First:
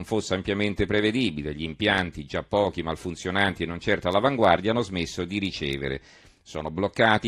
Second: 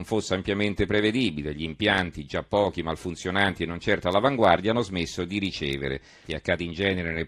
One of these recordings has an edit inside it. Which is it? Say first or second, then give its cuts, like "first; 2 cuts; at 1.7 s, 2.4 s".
second; 1 cut; at 6.3 s